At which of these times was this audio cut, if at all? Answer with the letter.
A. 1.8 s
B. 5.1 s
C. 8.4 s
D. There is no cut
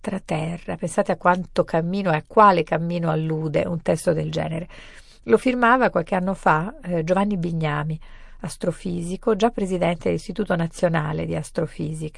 D